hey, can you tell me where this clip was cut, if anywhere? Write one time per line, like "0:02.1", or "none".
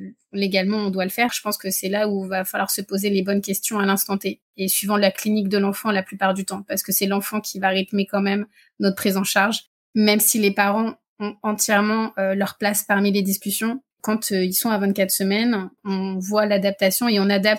0:01.3
0:13.9